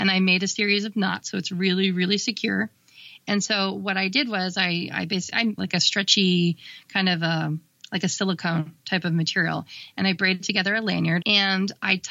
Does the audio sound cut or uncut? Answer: cut